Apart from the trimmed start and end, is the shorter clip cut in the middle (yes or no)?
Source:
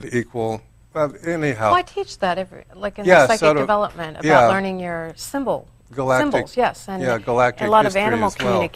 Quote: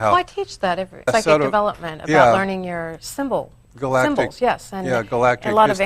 yes